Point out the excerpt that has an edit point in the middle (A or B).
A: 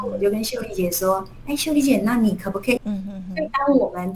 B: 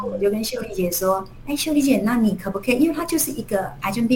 A